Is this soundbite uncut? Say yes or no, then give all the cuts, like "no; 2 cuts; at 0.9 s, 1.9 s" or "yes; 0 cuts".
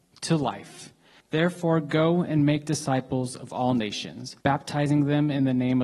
no; 2 cuts; at 1.2 s, 4.4 s